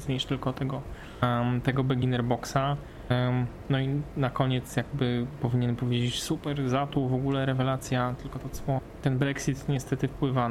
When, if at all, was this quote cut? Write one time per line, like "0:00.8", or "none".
none